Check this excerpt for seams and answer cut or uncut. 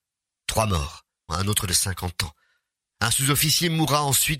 cut